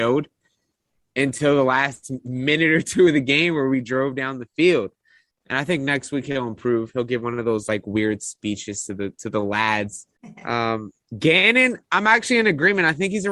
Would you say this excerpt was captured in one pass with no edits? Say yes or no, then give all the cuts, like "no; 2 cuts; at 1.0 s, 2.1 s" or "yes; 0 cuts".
no; 1 cut; at 5.3 s